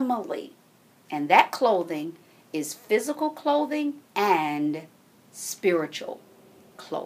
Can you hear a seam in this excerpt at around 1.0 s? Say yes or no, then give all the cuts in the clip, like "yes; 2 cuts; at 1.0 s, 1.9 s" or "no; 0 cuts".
yes; 2 cuts; at 1.0 s, 4.1 s